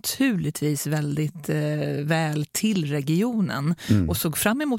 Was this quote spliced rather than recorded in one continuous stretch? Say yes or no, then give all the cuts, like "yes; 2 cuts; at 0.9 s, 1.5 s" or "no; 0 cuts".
no; 0 cuts